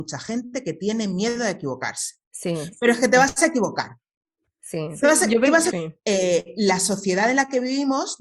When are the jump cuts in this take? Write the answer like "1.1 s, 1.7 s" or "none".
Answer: 2.2 s, 5.7 s